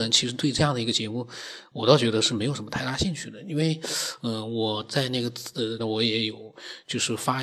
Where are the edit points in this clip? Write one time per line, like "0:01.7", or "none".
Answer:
0:05.8